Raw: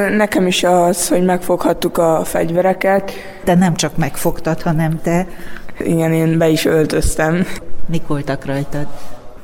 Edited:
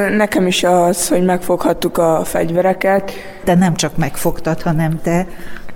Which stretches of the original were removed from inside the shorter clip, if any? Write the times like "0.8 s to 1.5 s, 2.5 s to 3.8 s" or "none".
none

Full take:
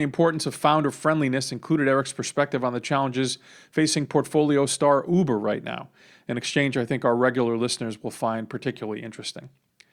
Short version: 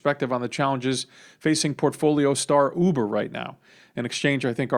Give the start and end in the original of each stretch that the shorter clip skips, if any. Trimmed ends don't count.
none

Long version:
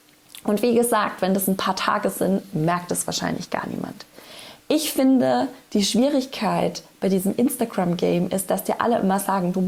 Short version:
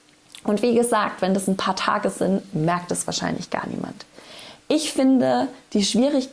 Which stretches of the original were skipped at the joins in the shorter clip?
none

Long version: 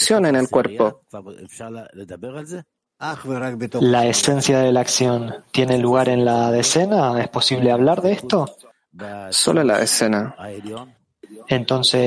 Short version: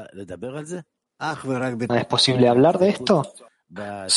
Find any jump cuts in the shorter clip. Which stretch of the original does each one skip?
3.7 s to 7.1 s

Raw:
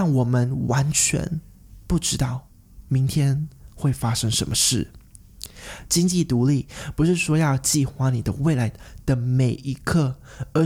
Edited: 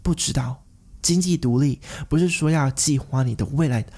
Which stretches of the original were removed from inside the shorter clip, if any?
2.9 s to 5.9 s

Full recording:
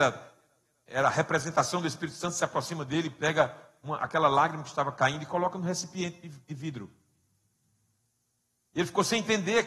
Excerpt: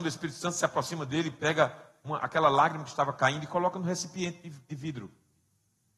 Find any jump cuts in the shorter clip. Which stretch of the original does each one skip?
none

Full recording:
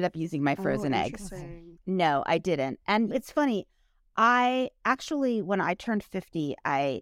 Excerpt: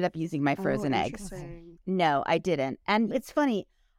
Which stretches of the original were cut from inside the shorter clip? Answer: none

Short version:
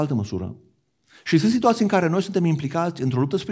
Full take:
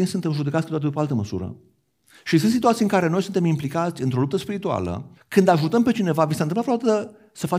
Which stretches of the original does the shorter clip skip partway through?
none

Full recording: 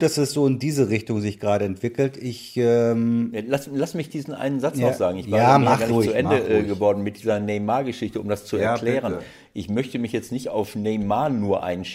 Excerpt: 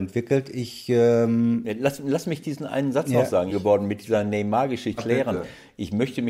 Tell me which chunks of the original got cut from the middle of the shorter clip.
5.2 s to 6.7 s, 8.1 s to 8.7 s

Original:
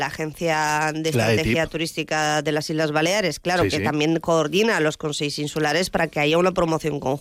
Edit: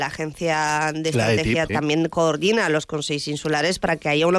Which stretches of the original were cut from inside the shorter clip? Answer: 1.7 s to 3.8 s

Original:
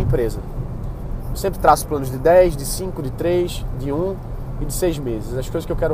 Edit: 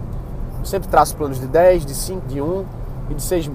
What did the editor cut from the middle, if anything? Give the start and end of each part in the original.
3.0 s to 3.8 s

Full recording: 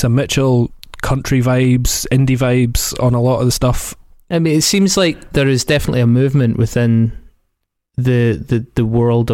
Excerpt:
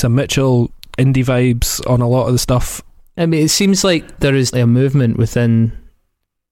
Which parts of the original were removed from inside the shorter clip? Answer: 1.0 s to 2.1 s, 5.7 s to 5.9 s

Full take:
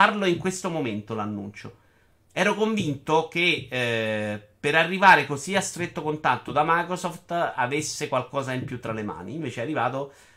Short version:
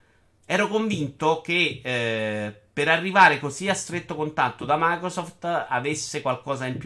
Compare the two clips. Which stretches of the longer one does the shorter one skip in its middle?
none

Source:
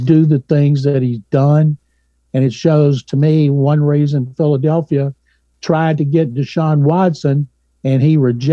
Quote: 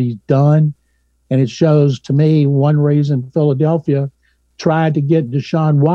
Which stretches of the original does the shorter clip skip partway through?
none

